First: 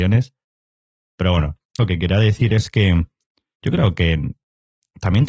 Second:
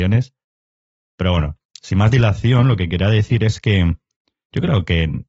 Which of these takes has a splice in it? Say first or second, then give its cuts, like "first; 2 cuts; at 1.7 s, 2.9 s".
first; 1 cut; at 1.8 s